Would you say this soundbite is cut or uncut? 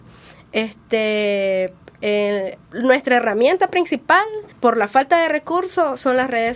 cut